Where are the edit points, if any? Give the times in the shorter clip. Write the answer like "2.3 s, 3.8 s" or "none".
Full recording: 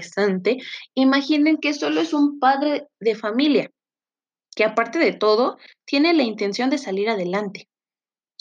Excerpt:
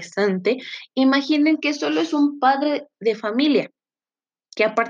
none